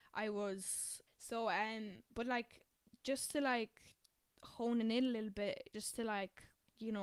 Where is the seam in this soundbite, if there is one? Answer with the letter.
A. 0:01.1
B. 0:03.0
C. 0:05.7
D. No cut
A